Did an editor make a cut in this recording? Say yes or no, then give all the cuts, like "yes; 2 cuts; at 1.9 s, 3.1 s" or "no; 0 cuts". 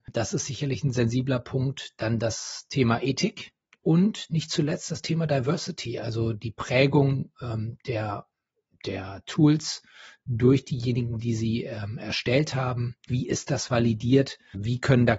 yes; 2 cuts; at 3.8 s, 13.1 s